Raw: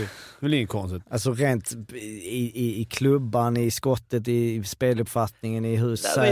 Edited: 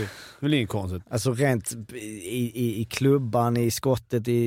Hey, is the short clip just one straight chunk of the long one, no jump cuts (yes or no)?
yes